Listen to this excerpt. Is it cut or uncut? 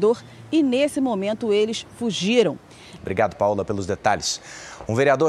cut